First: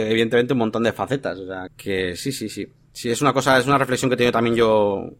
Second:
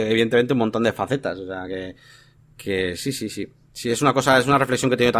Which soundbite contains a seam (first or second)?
first